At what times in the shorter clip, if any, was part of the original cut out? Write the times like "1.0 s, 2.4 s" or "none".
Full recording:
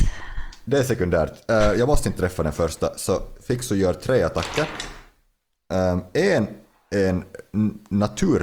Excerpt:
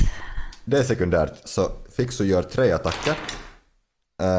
1.4 s